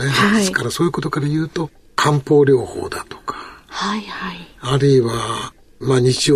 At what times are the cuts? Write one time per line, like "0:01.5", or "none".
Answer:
none

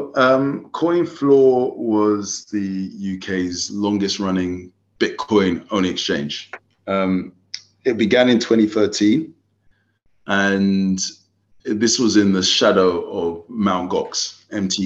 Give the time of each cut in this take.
none

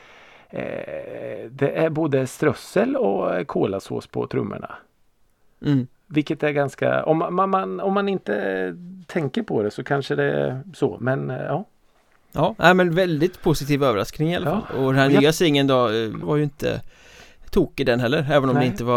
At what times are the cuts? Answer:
0:16.2

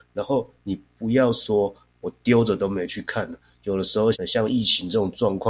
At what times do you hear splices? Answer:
0:04.1

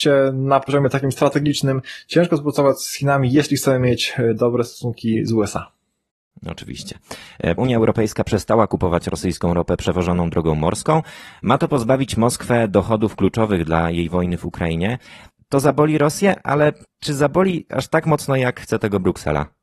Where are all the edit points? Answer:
0:07.6

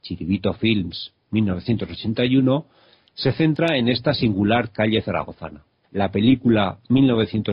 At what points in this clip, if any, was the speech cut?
0:05.8

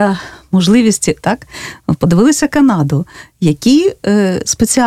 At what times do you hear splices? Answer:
0:01.2

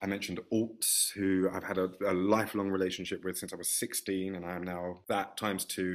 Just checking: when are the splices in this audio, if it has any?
none

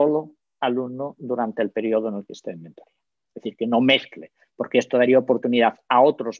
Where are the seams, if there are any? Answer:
none

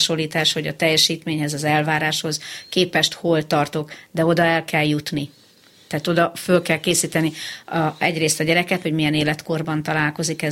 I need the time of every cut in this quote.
0:08.8

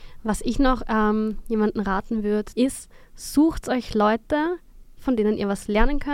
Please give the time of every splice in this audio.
0:02.5
0:05.0

